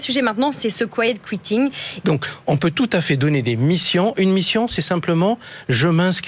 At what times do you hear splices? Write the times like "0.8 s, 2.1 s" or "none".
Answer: 2.0 s